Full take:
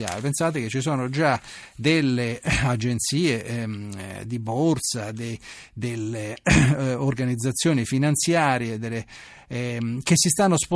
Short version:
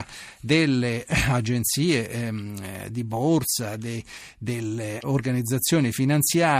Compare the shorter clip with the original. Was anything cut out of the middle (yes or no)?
yes